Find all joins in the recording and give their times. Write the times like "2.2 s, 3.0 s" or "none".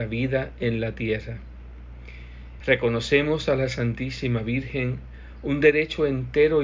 2.6 s